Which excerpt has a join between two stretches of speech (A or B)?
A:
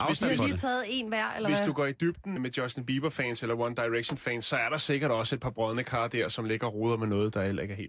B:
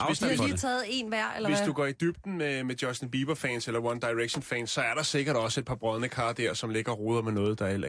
A